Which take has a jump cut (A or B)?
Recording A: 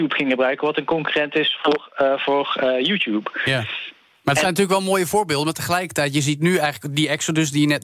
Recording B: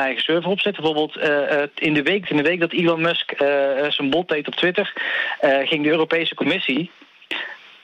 B